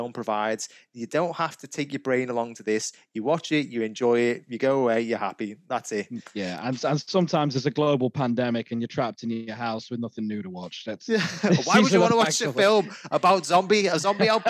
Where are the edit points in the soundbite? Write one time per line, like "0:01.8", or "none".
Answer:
none